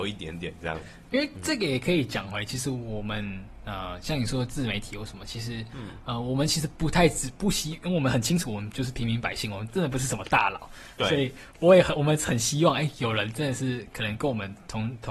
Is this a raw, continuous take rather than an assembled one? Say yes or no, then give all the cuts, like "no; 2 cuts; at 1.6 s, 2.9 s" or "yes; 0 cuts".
no; 1 cut; at 1.0 s